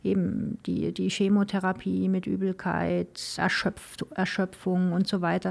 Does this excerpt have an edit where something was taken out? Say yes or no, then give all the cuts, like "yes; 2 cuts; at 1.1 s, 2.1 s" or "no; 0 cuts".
yes; 1 cut; at 3.4 s